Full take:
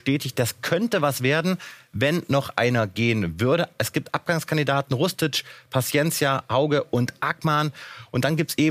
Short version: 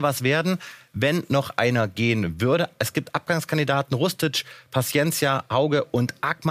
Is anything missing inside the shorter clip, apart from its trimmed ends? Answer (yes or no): no